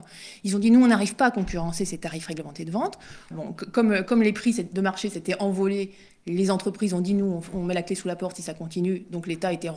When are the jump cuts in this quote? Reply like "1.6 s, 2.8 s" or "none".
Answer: 3.3 s

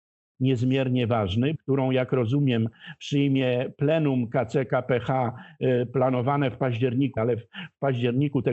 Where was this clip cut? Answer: 1.6 s, 7.2 s

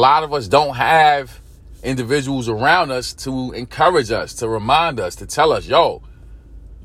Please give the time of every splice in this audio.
none

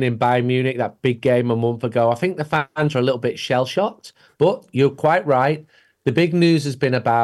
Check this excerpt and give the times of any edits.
4.3 s

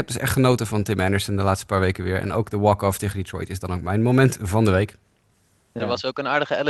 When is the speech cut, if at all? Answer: none

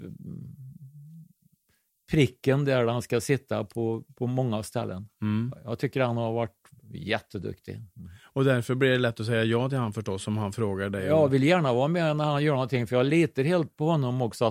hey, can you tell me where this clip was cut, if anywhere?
none

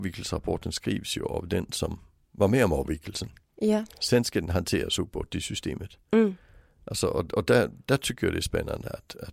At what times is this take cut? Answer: none

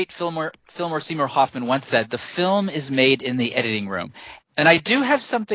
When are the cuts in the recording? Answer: 4.4 s

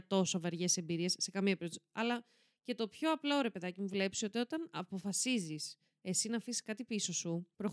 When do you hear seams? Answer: none

